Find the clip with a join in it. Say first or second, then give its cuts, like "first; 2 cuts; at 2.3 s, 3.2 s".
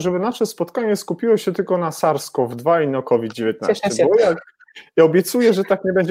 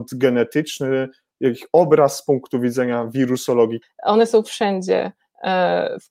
second; 1 cut; at 3.8 s